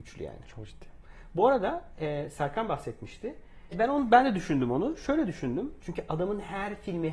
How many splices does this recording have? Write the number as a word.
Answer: two